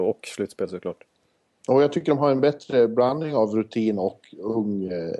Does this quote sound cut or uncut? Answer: uncut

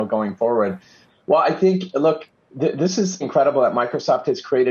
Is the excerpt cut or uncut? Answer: cut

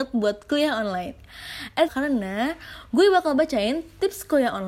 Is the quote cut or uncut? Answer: cut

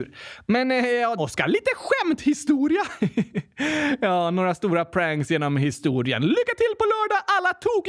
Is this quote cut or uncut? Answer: cut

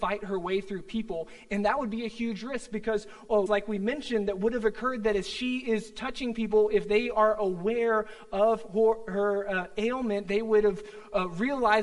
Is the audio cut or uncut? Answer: cut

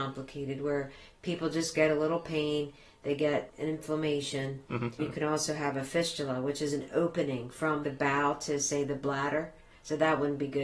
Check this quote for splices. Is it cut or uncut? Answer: cut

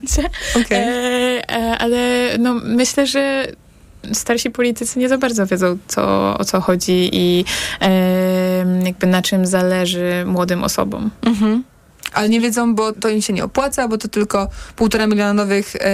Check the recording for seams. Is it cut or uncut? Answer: cut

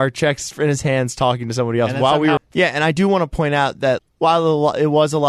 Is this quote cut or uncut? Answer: cut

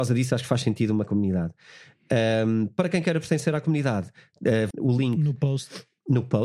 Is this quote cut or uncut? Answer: cut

